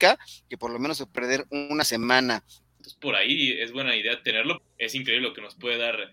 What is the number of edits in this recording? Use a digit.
2